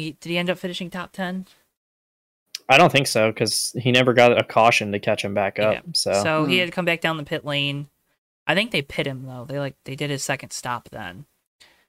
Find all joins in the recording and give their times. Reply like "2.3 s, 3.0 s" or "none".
none